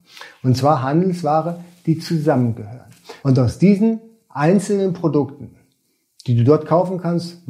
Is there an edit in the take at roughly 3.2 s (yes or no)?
yes